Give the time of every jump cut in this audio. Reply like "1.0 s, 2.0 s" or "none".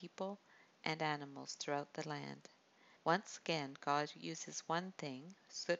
3.0 s